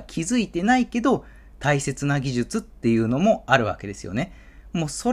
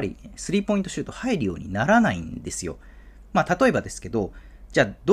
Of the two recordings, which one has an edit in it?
second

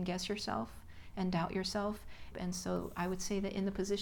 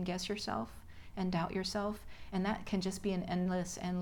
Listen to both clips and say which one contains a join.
first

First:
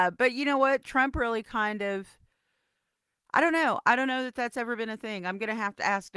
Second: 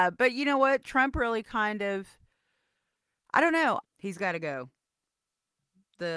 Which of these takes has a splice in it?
second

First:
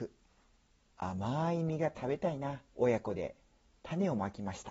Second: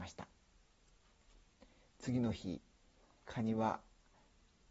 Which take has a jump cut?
first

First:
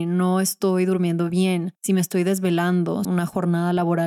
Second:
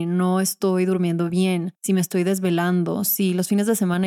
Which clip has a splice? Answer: first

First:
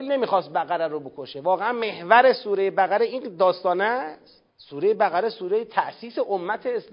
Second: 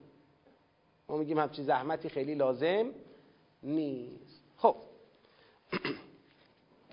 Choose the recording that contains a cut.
first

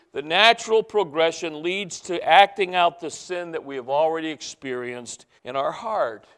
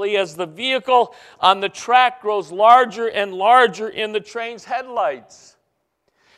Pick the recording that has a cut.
first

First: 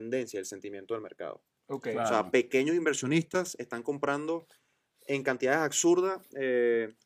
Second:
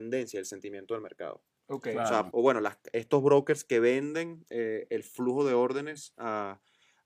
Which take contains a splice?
second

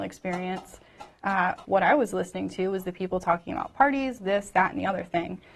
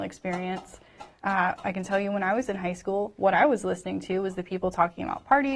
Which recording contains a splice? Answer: first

